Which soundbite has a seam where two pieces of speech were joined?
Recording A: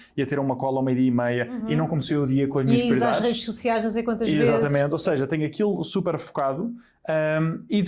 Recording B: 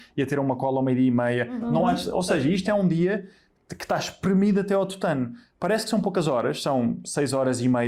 B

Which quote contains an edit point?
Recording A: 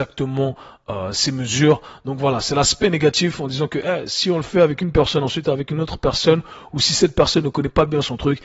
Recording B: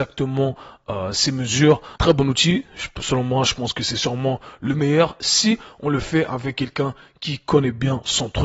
B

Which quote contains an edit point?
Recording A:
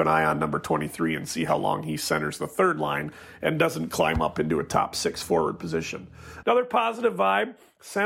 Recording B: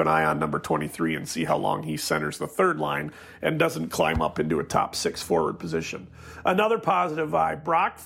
A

